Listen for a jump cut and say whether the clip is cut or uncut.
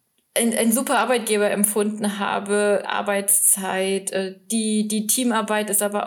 cut